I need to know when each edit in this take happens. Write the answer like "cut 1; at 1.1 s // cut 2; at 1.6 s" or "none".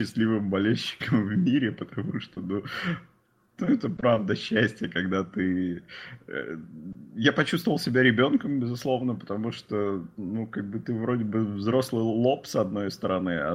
none